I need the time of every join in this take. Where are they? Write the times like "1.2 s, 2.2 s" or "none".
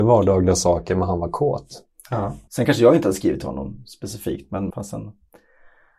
2.5 s, 4.7 s